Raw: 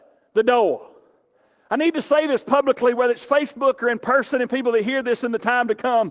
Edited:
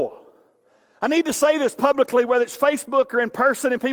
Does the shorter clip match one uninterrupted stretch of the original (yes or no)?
yes